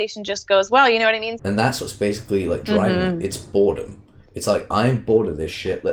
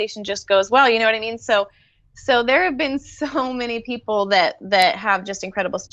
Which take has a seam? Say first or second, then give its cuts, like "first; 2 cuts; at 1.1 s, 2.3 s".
first; 1 cut; at 1.4 s